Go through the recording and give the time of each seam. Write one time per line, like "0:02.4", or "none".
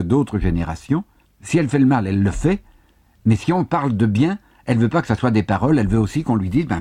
0:01.2